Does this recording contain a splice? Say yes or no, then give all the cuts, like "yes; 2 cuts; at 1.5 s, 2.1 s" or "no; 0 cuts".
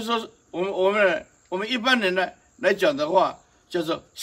no; 0 cuts